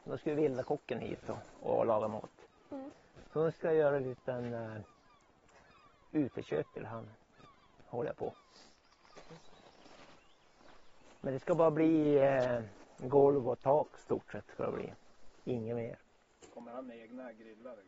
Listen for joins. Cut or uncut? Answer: uncut